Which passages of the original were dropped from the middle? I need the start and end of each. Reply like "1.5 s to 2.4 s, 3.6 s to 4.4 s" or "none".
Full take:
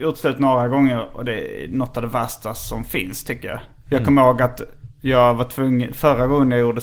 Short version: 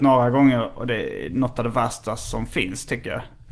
none